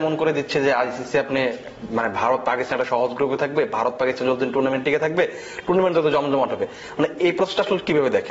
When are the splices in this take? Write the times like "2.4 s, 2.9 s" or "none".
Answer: 7.2 s